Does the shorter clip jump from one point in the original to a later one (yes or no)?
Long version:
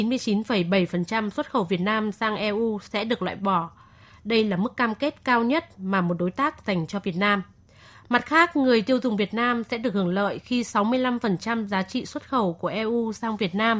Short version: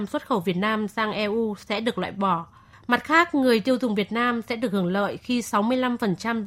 yes